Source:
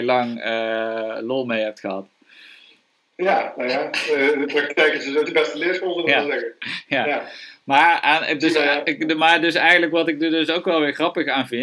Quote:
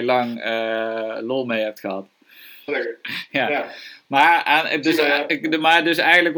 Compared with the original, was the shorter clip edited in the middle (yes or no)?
yes